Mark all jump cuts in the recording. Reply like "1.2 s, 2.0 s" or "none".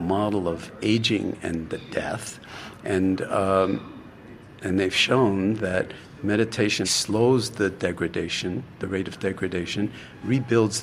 6.8 s